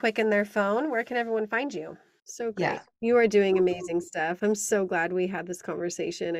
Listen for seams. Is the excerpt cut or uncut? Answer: cut